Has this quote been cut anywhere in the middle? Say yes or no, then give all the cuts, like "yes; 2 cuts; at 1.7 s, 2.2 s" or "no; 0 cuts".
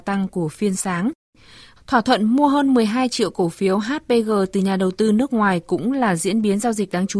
yes; 1 cut; at 1.8 s